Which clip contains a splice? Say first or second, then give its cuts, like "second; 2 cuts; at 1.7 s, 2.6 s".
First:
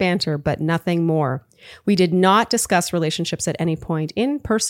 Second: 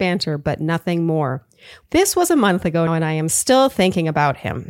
second; 2 cuts; at 1.8 s, 2.9 s